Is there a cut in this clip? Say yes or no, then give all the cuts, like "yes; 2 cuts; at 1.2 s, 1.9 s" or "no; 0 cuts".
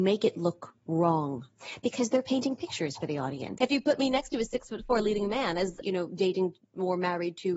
yes; 2 cuts; at 3.6 s, 5.8 s